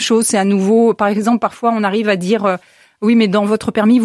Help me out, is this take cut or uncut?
uncut